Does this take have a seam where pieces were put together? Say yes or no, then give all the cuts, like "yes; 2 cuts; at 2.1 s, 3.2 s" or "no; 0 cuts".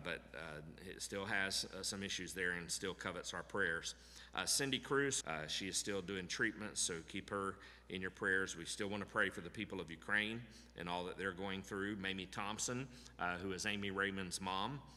yes; 1 cut; at 5.2 s